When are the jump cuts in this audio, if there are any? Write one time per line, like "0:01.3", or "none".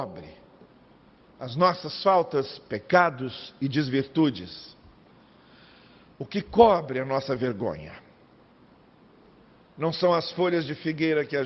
none